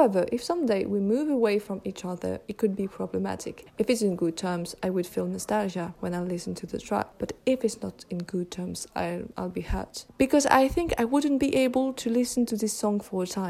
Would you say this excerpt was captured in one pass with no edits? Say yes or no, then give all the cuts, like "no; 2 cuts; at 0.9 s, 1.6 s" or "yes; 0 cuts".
yes; 0 cuts